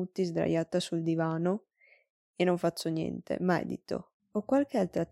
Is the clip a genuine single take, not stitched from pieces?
no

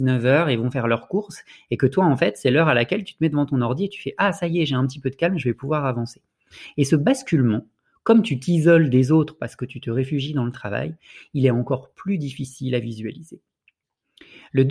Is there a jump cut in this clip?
no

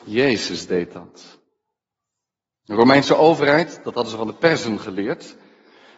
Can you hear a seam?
yes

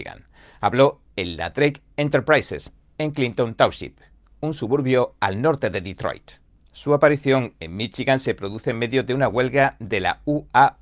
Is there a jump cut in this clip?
no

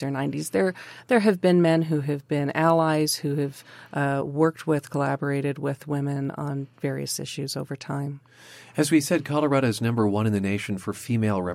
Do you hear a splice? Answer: no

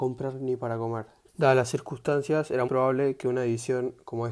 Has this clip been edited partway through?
yes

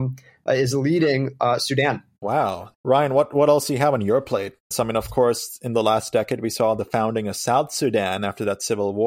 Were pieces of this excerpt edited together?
yes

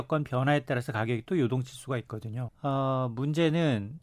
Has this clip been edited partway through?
yes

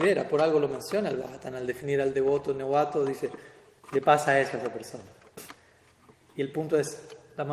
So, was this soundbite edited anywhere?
no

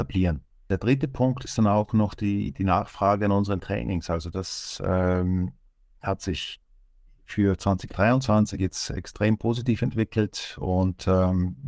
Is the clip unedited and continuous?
yes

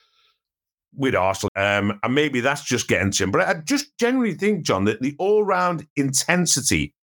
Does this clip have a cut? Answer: yes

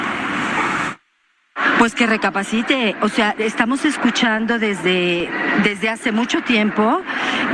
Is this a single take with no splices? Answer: yes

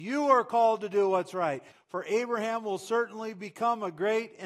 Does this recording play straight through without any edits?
no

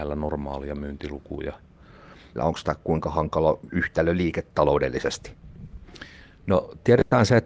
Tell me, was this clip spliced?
yes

